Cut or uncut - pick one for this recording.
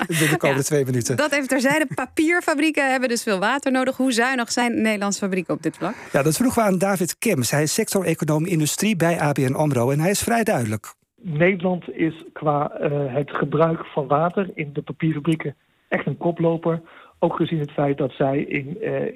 uncut